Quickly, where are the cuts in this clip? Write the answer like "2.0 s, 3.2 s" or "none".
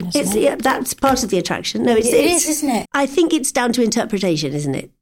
2.8 s